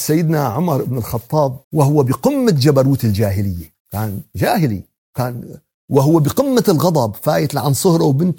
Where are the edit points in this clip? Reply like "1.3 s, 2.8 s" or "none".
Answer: 1.6 s, 3.8 s